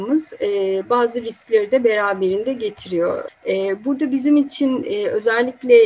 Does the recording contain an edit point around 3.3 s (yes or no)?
yes